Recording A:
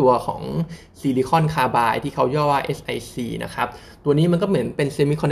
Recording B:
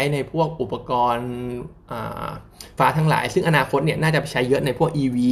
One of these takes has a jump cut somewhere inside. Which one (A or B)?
B